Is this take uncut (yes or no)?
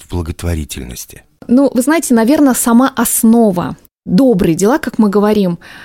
yes